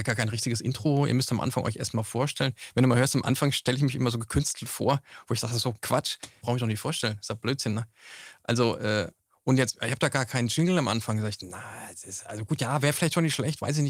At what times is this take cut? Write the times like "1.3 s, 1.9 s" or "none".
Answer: 6.4 s